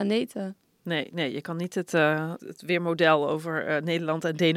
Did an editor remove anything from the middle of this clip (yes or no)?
yes